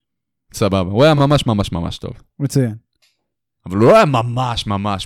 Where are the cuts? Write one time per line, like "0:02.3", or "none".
none